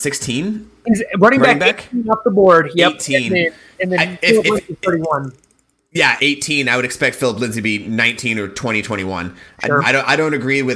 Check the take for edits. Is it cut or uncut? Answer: cut